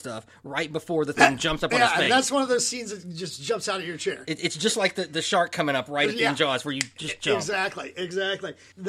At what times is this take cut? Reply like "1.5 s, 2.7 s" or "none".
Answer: none